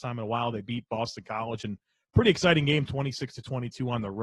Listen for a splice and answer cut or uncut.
uncut